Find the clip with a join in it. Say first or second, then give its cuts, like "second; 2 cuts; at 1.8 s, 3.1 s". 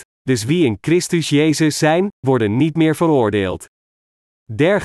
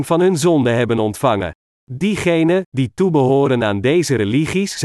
second; 1 cut; at 1.7 s